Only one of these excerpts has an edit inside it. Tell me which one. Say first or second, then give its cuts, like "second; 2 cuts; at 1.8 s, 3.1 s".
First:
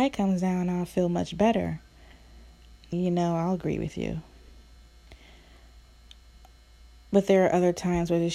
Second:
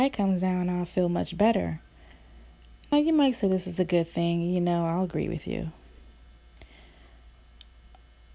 first; 1 cut; at 2.9 s